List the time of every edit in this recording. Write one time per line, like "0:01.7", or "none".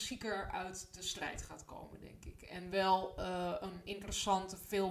none